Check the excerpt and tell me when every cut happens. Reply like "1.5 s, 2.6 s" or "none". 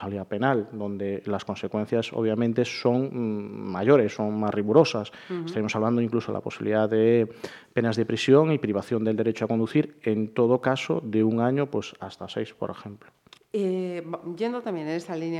13.4 s